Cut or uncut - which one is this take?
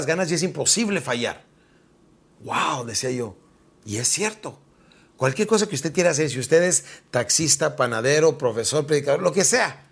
uncut